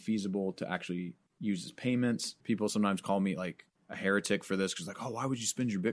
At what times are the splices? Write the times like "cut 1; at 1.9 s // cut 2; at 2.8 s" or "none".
cut 1; at 2.4 s